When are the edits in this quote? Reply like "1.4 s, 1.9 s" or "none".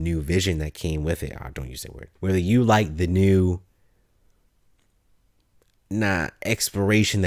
2.2 s